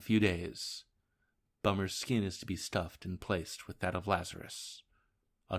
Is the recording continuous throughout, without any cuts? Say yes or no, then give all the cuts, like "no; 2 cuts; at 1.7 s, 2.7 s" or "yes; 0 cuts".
yes; 0 cuts